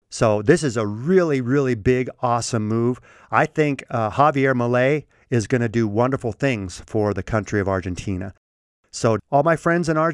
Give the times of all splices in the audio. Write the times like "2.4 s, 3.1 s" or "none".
9.2 s